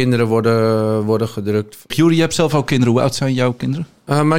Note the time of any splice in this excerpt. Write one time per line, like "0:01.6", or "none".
0:01.9

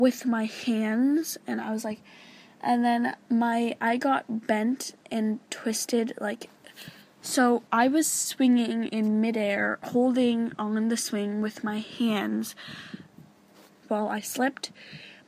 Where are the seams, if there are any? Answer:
0:07.7
0:13.8

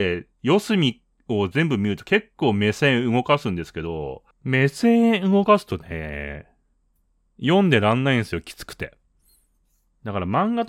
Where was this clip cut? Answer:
0:04.3

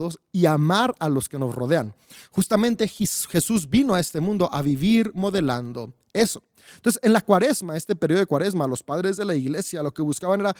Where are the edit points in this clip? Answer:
none

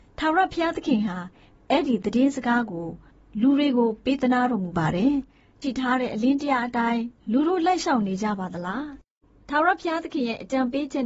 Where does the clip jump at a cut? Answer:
0:05.6
0:07.2

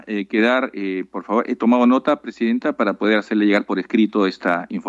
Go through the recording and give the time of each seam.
none

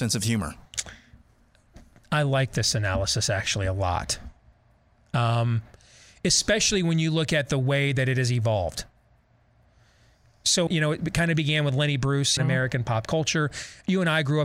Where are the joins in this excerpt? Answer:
0:10.7
0:12.4

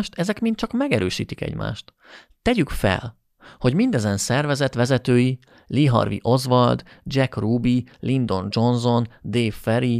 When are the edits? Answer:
none

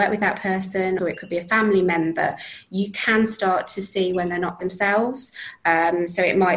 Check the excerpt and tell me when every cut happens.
0:01.0
0:04.6

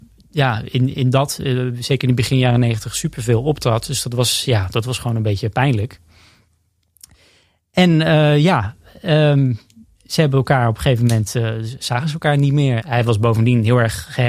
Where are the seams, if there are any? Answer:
0:12.8

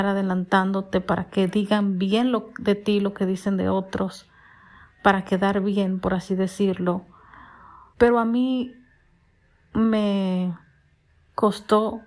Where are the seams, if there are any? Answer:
0:07.9

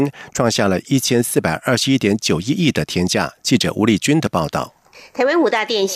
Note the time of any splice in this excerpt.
none

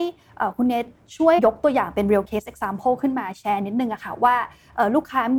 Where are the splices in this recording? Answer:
0:01.4

